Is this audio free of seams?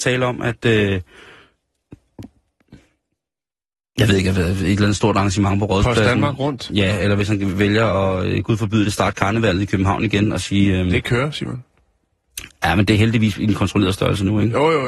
yes; 0 cuts

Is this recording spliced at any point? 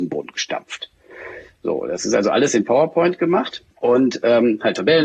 yes; 1 cut; at 3.7 s

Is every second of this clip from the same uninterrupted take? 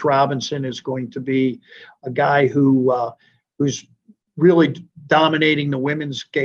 yes; 0 cuts

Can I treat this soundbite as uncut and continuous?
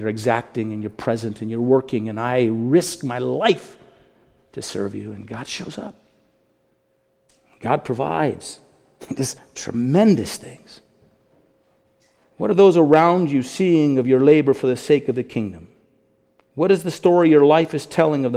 yes; 0 cuts

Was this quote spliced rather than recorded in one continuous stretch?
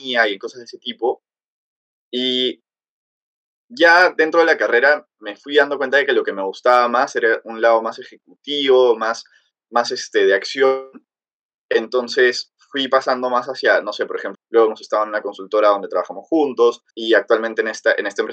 yes; 2 cuts; at 14.3 s, 16.9 s

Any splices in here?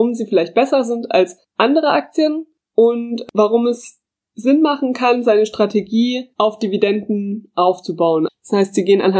yes; 2 cuts; at 6.3 s, 8.3 s

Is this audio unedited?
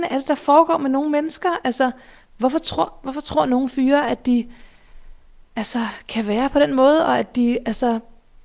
yes; 0 cuts

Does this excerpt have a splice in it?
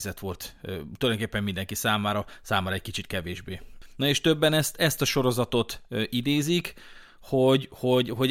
no; 0 cuts

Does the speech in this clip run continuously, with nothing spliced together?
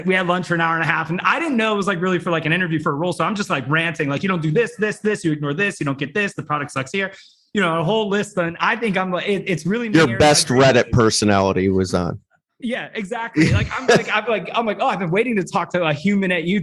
yes; 0 cuts

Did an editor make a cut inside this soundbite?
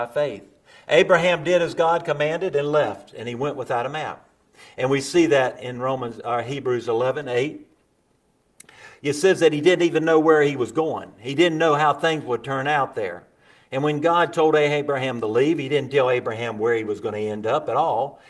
no; 0 cuts

